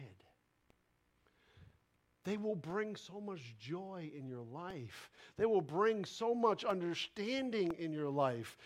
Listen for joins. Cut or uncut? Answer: uncut